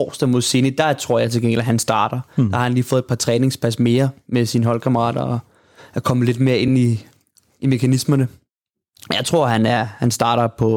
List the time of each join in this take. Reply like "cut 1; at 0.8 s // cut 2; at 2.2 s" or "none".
none